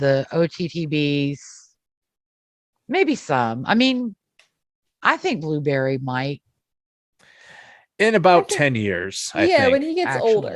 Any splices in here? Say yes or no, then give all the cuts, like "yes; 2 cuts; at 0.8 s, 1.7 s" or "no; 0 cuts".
no; 0 cuts